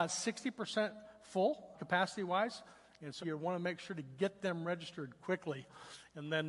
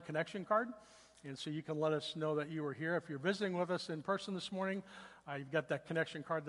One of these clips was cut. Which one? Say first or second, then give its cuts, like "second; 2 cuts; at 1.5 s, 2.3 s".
first; 2 cuts; at 1.7 s, 3.2 s